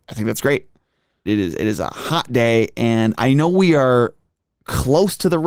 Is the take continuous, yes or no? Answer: no